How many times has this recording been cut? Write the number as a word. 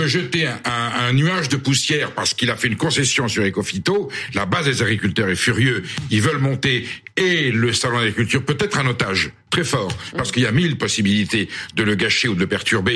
zero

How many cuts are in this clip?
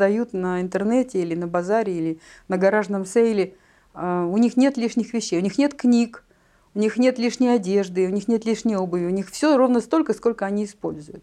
zero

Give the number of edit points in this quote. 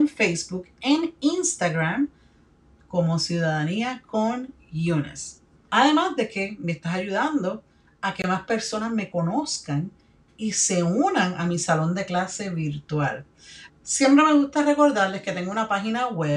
two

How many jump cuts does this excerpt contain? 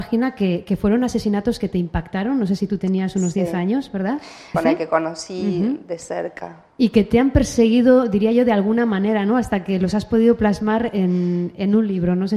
one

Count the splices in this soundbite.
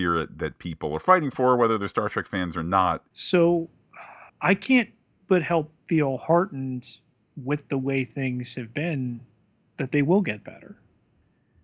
two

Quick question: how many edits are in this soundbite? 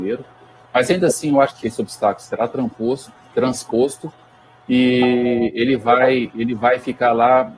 one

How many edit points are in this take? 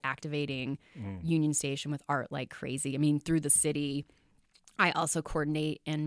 zero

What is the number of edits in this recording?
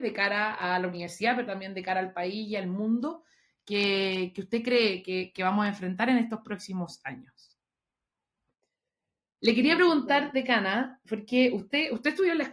one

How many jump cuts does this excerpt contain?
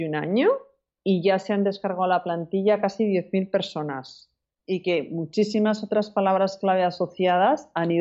one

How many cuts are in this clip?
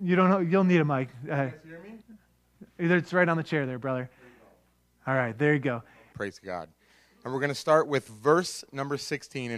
two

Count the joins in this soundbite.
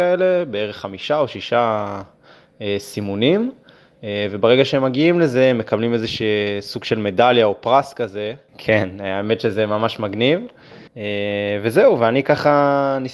two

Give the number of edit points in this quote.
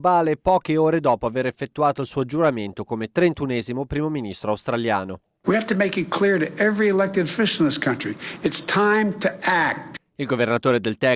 one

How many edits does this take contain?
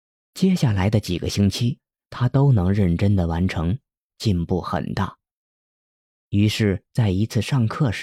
two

